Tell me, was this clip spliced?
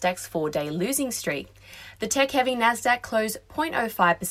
no; 0 cuts

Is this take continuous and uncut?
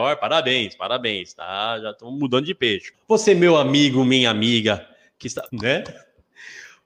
no; 2 cuts; at 2.9 s, 5.5 s

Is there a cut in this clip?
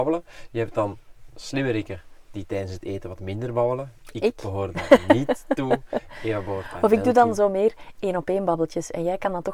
no; 0 cuts

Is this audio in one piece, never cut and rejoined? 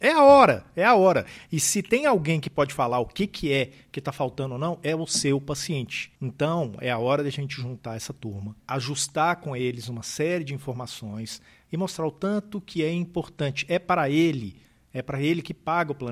yes; 0 cuts

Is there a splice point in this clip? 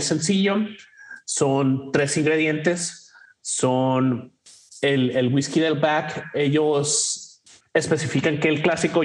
no; 0 cuts

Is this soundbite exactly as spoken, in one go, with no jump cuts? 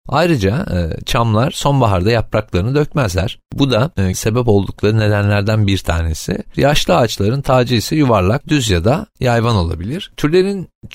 no; 2 cuts; at 4.1 s, 6.5 s

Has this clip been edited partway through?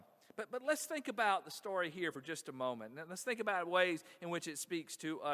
no; 0 cuts

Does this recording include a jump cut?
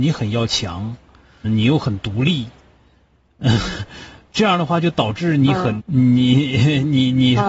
yes; 2 cuts; at 1.4 s, 5.8 s

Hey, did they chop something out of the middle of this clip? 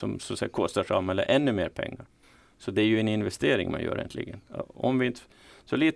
no; 0 cuts

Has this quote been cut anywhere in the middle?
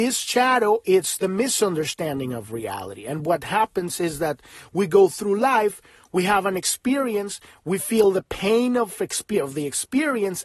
no; 0 cuts

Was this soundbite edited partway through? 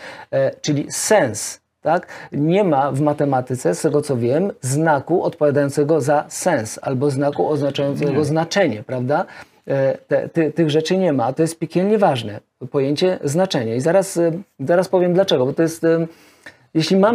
no; 0 cuts

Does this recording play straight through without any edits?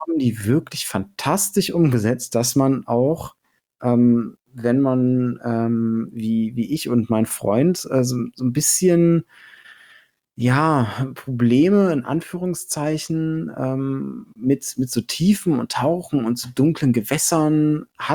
yes; 0 cuts

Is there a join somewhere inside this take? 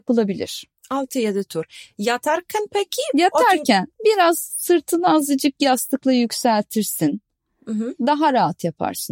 no; 0 cuts

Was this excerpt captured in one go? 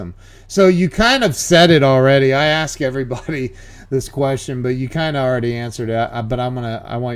yes; 0 cuts

